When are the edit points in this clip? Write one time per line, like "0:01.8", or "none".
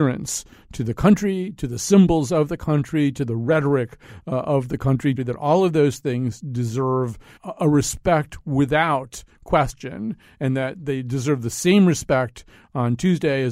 0:05.2
0:07.4